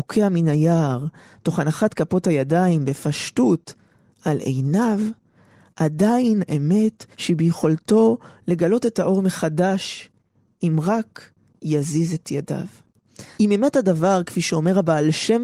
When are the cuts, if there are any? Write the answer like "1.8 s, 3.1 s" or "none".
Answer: 7.1 s, 13.4 s